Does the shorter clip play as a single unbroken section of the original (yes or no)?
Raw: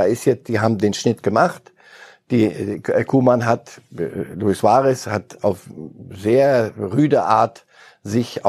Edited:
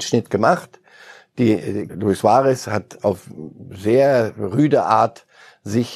no